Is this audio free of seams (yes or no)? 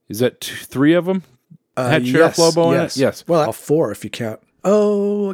no